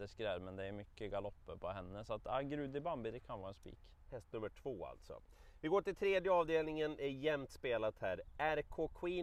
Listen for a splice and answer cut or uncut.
uncut